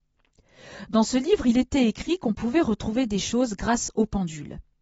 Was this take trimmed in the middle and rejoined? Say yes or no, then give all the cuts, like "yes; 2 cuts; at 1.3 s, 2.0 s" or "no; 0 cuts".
no; 0 cuts